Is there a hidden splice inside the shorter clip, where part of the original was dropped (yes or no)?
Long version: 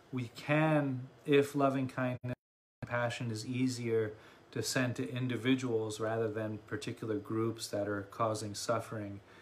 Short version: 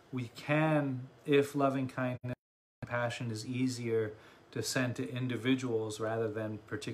no